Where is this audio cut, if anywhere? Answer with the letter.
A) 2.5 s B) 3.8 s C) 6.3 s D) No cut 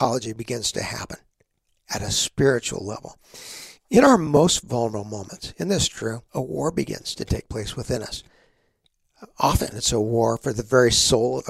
C